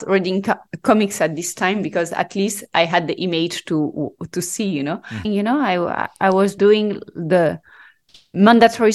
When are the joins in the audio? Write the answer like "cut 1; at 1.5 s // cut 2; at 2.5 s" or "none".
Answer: cut 1; at 5.2 s // cut 2; at 6.6 s